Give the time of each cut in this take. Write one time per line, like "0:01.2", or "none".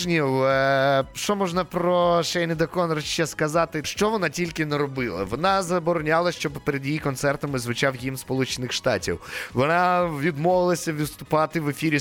0:03.8